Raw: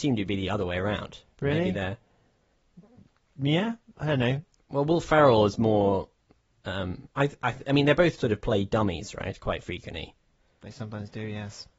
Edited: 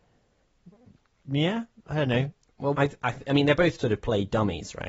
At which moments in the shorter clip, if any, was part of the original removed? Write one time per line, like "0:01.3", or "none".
0:02.7